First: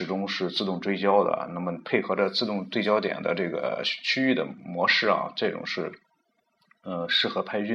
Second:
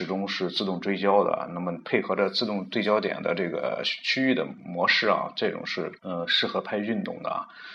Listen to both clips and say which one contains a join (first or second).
second